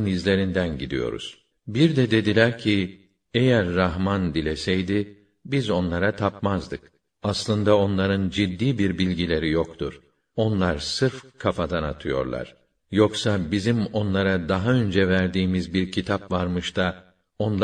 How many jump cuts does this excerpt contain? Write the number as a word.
one